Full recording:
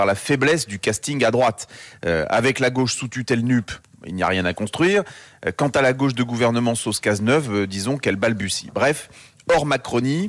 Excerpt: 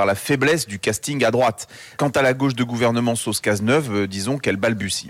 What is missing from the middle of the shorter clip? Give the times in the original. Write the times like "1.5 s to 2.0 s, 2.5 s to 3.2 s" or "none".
2.0 s to 5.6 s